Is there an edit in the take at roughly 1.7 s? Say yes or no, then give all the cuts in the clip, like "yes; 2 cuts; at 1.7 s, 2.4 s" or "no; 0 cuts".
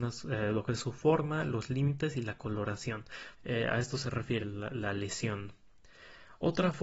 no; 2 cuts; at 3.4 s, 4.4 s